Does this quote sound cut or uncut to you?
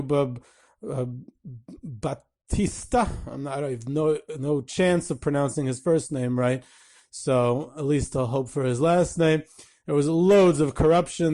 uncut